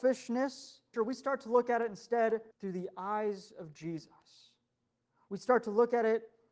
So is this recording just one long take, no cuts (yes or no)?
no